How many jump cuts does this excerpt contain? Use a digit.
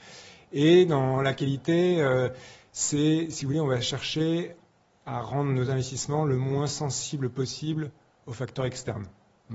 0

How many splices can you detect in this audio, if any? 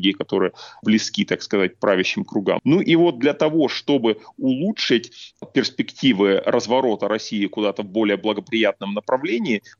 1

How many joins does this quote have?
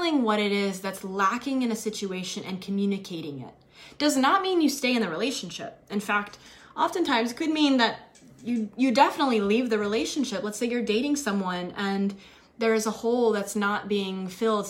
0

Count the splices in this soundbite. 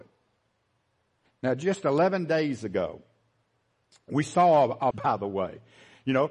2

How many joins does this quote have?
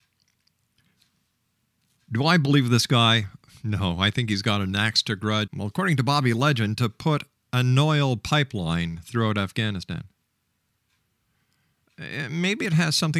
1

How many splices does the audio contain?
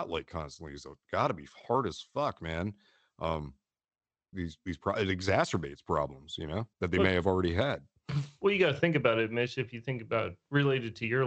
2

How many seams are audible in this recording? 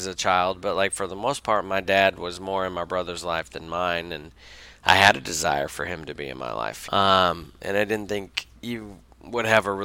2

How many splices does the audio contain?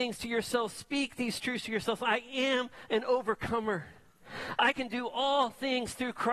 0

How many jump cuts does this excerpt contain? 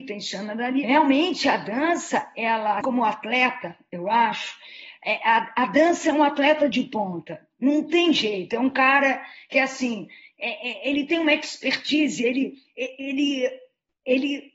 1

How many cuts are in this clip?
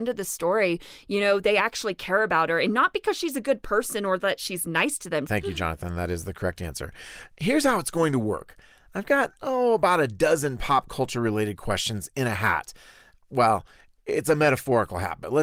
2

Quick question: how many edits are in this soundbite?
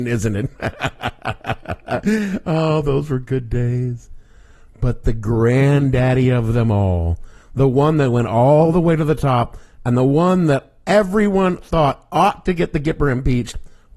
0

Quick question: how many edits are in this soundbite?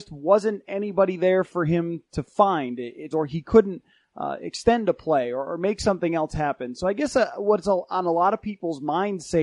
1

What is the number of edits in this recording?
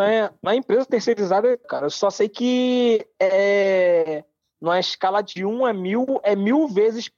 1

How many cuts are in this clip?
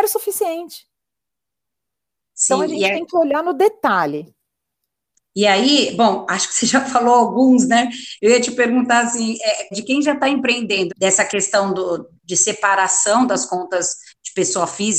2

